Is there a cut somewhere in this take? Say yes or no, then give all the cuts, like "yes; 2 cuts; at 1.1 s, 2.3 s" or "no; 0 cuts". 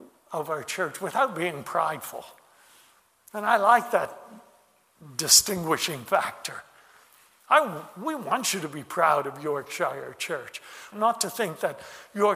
yes; 1 cut; at 10.9 s